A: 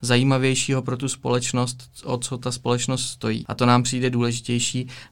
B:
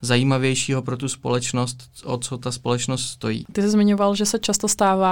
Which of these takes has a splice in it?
B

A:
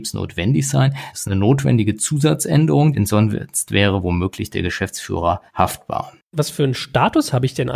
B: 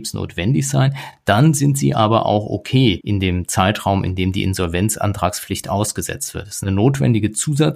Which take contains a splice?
A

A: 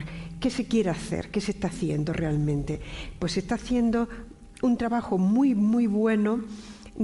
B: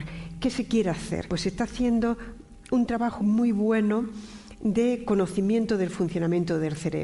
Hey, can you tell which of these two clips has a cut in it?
B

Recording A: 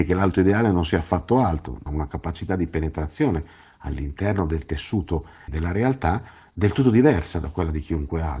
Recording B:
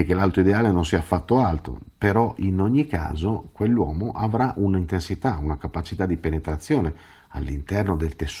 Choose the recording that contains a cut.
A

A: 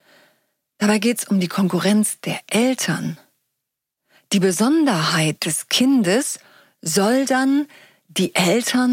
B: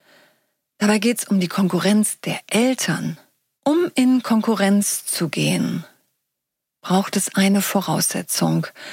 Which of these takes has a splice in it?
B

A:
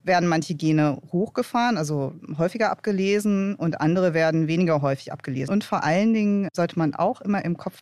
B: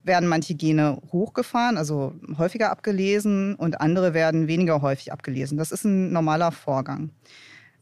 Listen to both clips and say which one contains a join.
A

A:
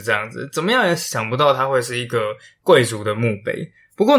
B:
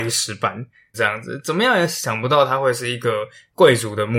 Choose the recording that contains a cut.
B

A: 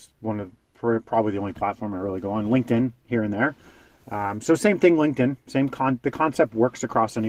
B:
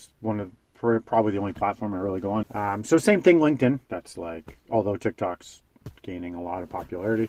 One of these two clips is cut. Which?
B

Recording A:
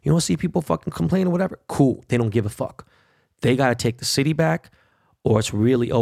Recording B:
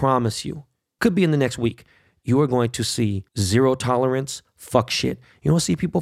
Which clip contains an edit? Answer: B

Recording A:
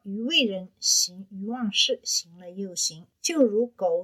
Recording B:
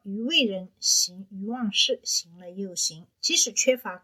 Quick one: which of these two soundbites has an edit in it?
B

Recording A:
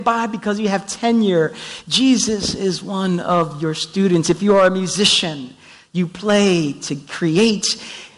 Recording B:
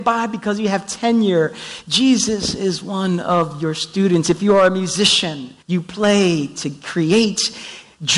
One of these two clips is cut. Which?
B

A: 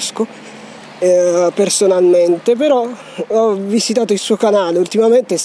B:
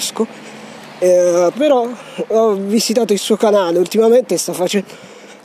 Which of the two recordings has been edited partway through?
B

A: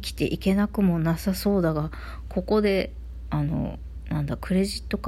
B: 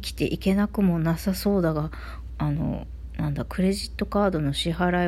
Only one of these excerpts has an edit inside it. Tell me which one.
B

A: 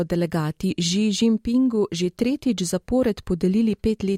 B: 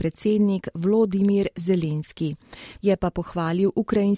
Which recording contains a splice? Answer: B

